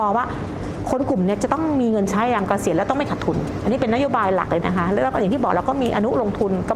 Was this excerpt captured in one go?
no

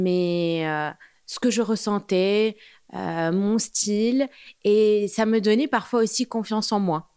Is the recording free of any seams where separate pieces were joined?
yes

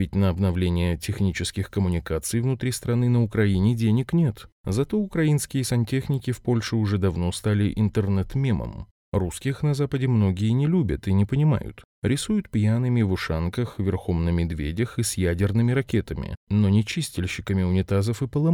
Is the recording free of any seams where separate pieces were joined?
yes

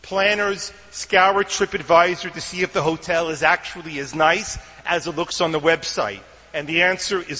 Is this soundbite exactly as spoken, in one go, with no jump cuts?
yes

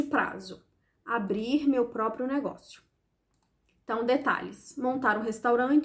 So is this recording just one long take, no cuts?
yes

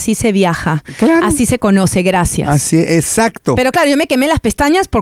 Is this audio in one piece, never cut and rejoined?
yes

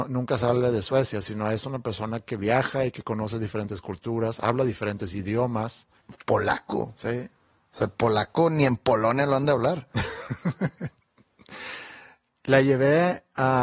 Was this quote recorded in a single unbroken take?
no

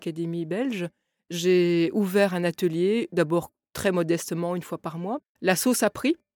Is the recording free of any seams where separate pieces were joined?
yes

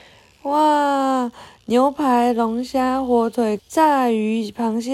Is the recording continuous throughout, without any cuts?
no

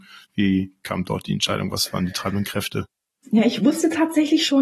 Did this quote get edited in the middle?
no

